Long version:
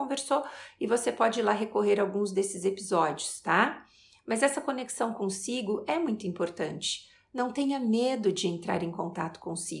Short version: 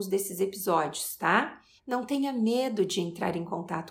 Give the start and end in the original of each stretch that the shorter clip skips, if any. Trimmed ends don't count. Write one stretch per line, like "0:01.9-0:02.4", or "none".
0:04.0-0:07.2

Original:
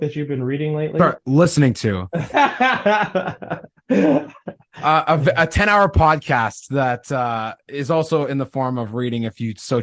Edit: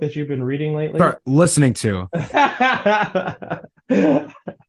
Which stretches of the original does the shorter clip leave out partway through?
none

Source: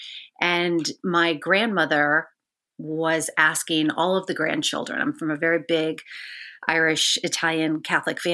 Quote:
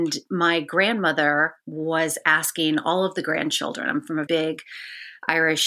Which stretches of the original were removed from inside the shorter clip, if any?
0:02.3-0:02.7
0:05.4-0:05.7

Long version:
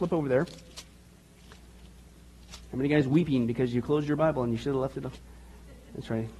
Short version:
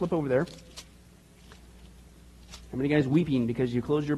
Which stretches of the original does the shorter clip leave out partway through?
none

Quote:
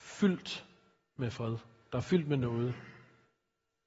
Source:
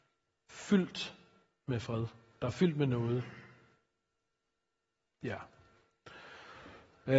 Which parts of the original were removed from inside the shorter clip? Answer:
none

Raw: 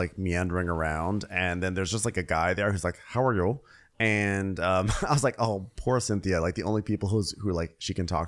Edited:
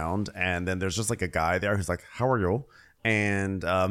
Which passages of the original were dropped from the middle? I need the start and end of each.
none

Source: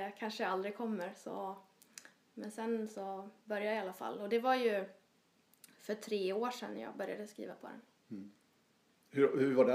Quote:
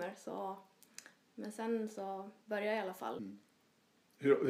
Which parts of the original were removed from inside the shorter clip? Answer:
0:04.2-0:08.1

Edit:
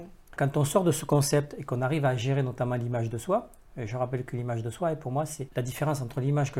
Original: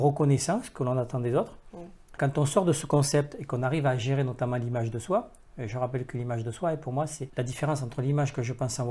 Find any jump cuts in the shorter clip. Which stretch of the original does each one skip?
none

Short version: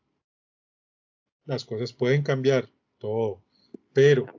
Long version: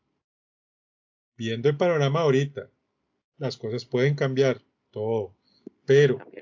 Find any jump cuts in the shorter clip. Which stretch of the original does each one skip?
0:01.3-0:03.2

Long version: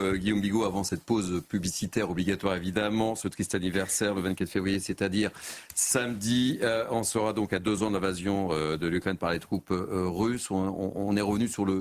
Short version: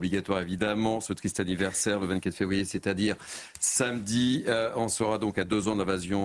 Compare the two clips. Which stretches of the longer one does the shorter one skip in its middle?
none

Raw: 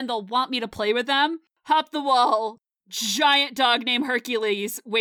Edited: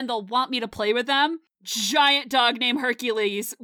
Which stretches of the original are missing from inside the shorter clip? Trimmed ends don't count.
0:01.5-0:02.8

